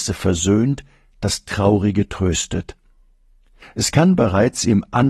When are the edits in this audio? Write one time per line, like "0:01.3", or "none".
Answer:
0:03.6